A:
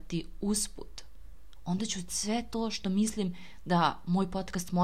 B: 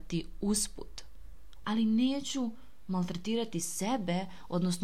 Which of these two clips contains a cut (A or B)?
B